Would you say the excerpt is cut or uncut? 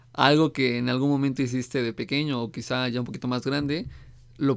uncut